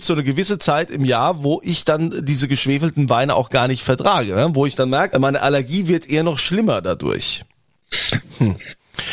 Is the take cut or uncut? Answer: cut